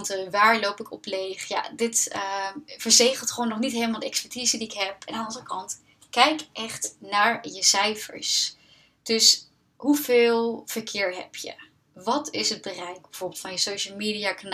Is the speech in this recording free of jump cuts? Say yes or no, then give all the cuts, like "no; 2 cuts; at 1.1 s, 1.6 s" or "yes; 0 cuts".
yes; 0 cuts